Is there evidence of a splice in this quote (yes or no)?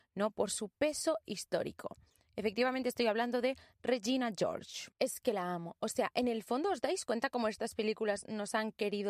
no